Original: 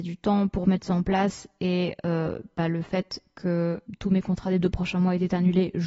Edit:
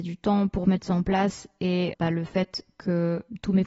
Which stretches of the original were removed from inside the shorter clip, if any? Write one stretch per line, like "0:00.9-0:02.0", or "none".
0:01.9-0:02.5